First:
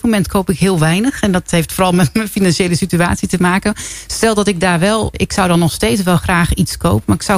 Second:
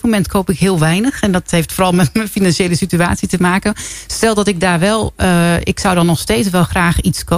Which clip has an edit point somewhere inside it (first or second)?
first